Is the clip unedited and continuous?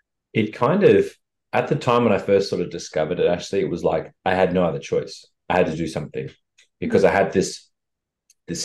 no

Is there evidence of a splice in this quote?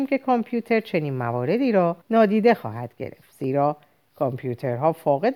yes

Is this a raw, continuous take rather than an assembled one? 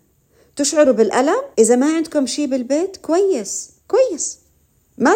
no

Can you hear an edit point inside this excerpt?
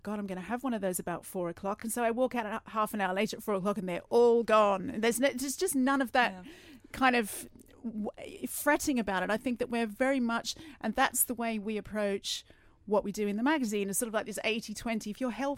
no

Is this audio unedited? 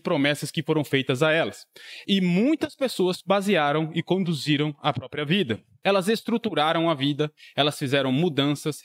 no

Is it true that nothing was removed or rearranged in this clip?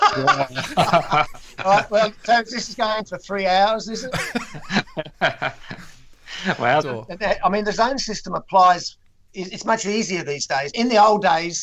no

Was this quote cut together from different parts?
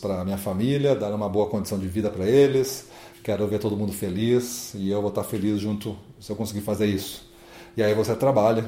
no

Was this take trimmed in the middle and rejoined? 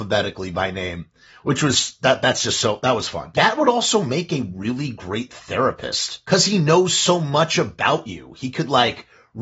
no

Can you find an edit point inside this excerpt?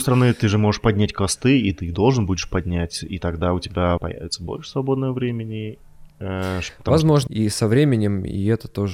yes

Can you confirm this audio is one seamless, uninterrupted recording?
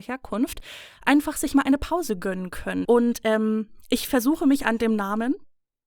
no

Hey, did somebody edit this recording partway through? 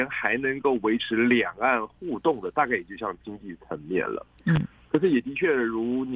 no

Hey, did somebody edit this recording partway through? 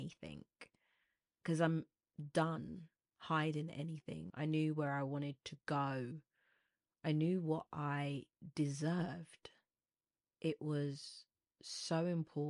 yes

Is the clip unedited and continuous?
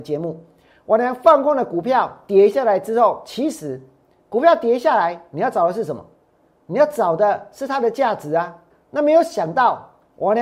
no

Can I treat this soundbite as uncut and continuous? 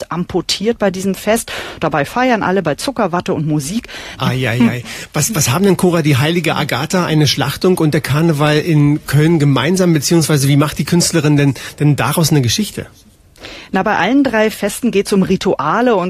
no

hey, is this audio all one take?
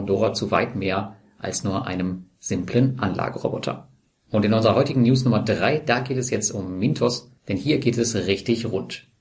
yes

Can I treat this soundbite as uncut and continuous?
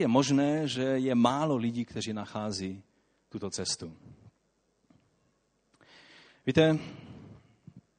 yes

